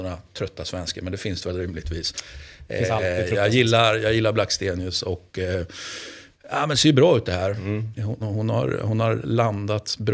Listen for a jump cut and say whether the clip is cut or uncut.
cut